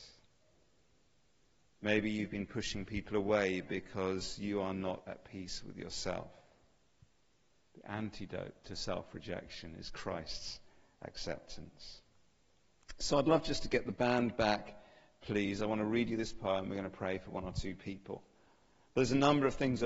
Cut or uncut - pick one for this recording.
uncut